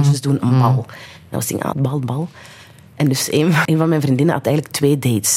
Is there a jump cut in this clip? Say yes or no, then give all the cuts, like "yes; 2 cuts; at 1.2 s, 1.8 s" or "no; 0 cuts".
yes; 2 cuts; at 1.7 s, 3.6 s